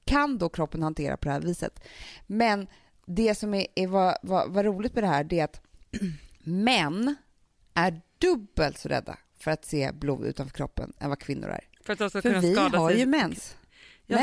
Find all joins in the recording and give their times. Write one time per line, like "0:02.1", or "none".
none